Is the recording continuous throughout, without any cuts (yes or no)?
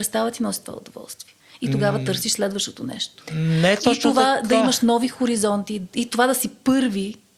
yes